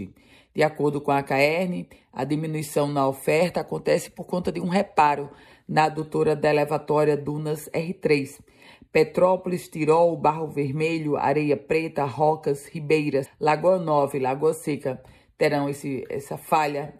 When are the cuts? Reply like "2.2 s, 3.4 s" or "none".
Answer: 13.3 s